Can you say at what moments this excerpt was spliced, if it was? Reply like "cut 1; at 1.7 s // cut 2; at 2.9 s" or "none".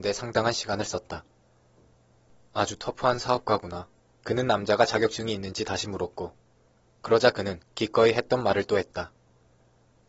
cut 1; at 4.2 s